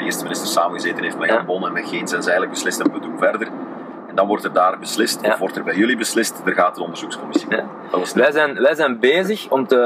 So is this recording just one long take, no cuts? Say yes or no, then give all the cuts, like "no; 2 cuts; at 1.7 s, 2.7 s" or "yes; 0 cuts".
yes; 0 cuts